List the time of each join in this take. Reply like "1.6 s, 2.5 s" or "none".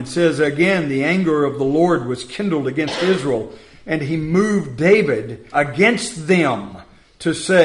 5.5 s

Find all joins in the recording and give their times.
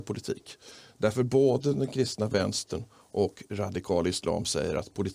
none

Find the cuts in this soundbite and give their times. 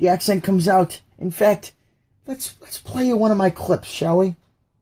1.1 s

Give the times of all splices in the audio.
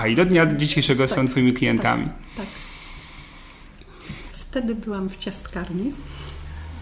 4.3 s

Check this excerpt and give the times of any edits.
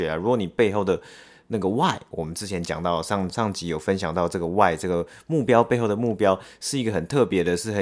3.3 s

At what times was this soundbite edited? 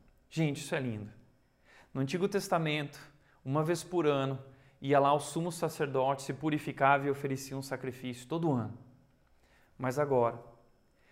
none

